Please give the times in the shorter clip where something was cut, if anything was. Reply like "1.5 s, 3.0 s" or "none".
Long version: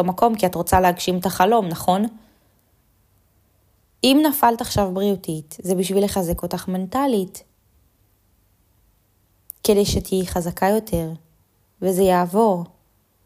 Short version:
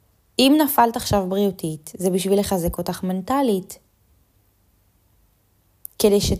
none